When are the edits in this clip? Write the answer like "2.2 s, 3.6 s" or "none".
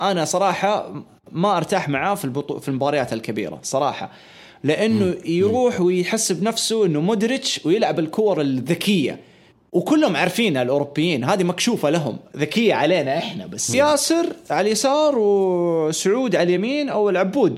13.7 s